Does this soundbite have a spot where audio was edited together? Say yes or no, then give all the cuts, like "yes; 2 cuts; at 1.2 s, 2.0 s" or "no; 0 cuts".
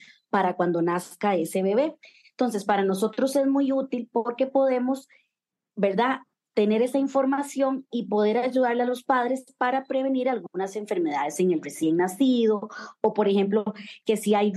no; 0 cuts